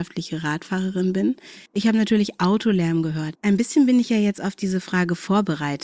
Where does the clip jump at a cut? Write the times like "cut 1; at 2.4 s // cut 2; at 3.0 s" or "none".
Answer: cut 1; at 1.7 s // cut 2; at 3.3 s